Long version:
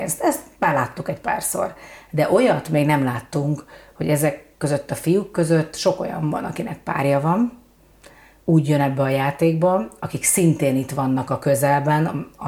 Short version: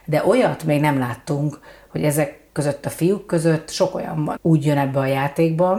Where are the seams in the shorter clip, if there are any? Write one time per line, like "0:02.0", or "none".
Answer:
0:04.4

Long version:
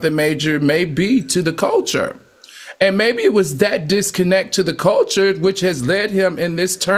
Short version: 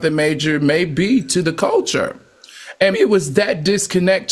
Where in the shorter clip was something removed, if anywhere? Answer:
0:02.9

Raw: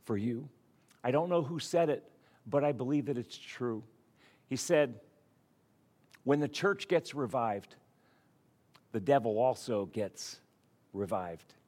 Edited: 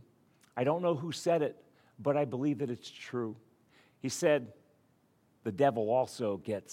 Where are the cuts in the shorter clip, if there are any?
0:05.4

